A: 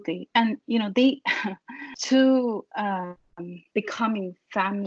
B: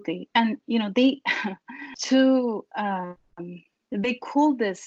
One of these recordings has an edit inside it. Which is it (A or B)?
A